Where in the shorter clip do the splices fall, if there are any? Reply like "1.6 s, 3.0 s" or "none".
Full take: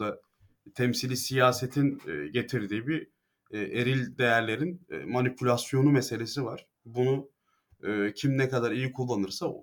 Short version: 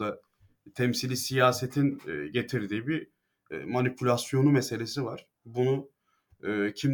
3.5 s